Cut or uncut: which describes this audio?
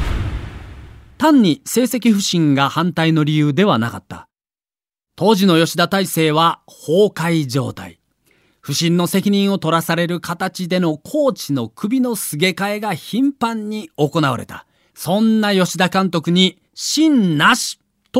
cut